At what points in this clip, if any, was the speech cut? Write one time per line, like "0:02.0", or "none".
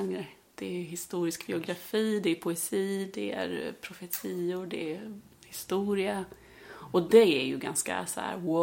none